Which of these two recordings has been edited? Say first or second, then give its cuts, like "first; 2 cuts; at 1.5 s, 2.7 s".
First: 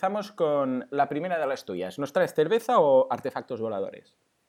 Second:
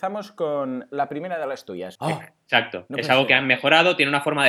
second; 1 cut; at 2.0 s